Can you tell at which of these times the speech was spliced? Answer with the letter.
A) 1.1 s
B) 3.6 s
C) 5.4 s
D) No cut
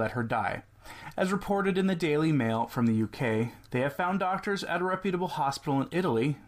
B